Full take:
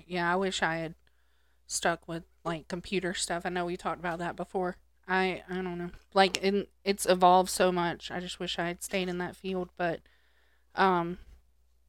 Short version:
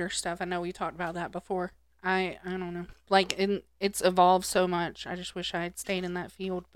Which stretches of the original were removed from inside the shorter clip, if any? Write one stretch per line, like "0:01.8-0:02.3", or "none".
none